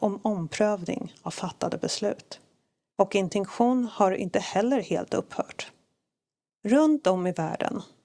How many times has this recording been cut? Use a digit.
1